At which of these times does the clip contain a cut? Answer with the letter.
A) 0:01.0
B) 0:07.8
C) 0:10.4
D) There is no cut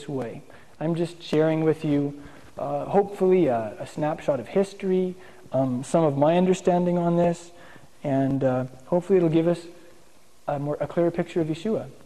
D